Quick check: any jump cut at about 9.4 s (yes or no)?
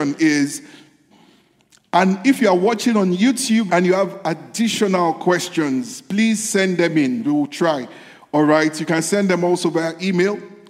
no